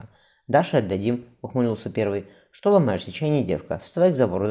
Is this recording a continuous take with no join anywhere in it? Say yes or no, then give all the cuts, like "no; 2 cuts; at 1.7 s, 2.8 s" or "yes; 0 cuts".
yes; 0 cuts